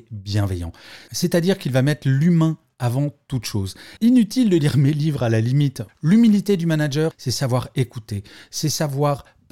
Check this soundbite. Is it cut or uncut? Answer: cut